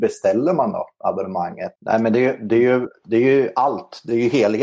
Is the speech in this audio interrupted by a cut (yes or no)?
yes